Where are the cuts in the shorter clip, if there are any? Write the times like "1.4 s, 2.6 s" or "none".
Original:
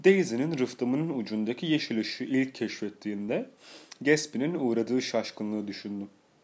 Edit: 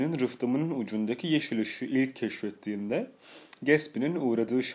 none